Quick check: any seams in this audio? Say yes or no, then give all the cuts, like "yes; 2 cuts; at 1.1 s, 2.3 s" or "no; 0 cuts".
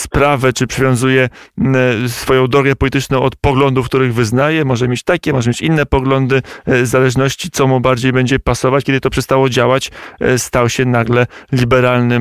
yes; 1 cut; at 8.8 s